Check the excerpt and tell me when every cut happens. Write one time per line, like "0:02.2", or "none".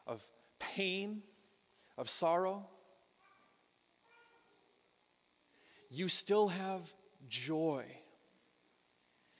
none